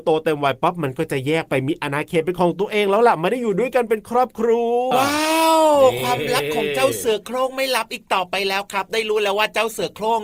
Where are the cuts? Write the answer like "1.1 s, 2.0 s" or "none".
4.9 s

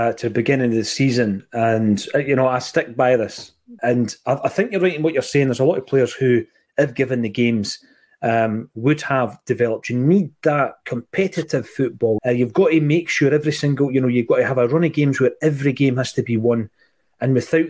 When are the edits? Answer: 3.8 s, 12.2 s

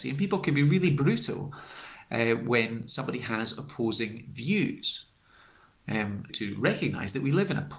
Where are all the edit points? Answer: 6.3 s

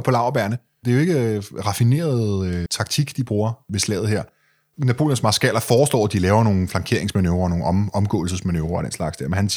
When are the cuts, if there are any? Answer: 2.7 s

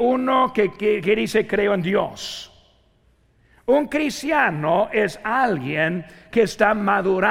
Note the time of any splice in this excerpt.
none

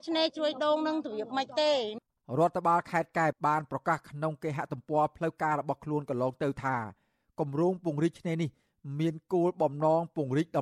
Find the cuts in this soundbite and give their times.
3.3 s

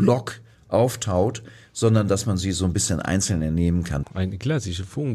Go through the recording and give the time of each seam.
4.0 s

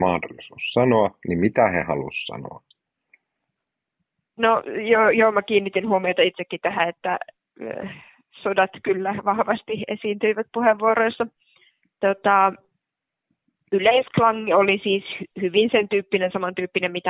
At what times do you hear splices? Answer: none

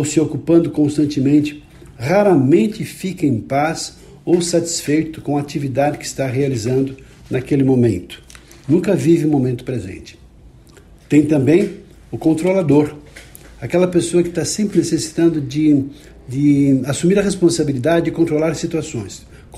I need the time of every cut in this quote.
none

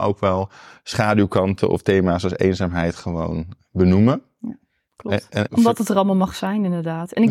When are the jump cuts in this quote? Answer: 5.5 s

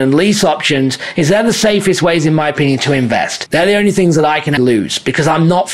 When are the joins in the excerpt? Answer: 3.5 s, 4.6 s

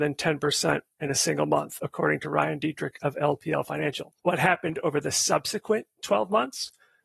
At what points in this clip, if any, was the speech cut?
4.2 s

